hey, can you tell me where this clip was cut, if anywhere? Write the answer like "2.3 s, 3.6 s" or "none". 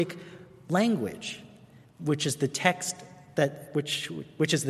none